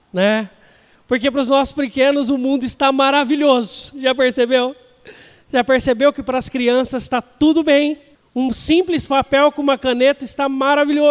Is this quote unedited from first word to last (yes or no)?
yes